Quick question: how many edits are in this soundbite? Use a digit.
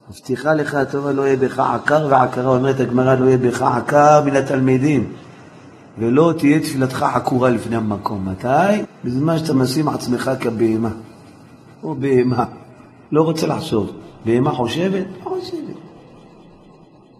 1